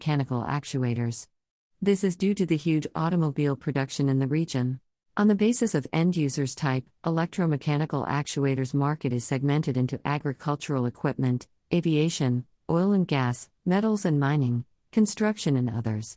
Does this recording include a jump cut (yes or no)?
yes